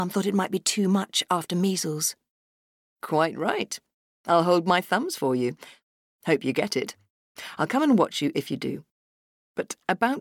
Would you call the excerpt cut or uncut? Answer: uncut